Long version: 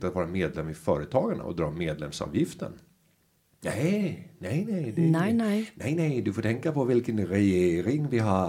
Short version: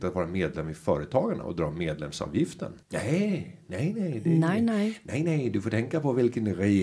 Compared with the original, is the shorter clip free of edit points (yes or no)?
no